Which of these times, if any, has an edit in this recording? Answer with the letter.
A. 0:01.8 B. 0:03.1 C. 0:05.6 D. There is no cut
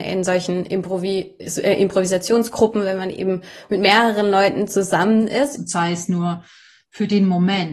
C